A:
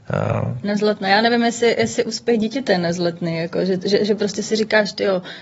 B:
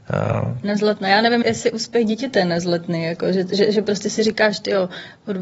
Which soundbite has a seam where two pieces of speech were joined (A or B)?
B